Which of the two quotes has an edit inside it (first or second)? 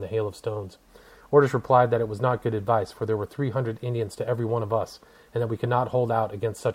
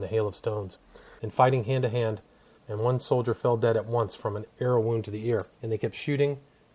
second